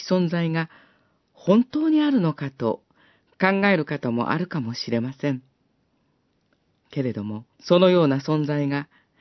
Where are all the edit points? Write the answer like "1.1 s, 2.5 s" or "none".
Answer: 7.5 s